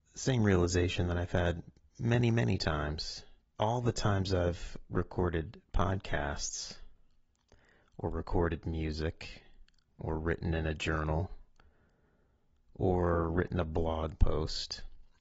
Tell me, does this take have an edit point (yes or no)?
yes